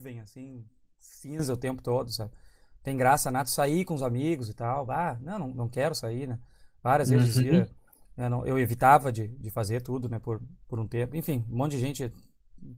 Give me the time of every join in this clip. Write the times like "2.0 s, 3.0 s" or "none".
none